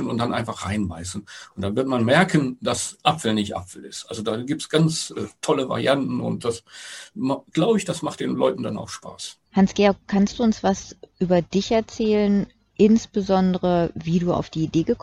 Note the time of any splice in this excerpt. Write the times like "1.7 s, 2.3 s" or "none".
9.5 s